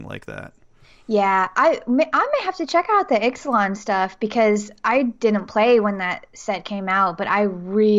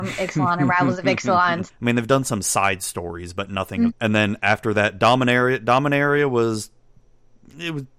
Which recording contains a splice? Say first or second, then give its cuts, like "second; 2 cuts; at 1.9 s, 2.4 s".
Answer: second; 2 cuts; at 1.7 s, 3.9 s